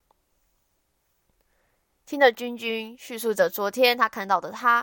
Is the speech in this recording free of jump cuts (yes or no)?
yes